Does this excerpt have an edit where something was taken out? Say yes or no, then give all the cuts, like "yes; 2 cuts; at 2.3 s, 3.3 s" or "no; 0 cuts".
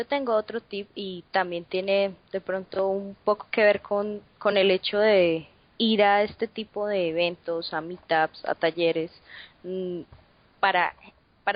no; 0 cuts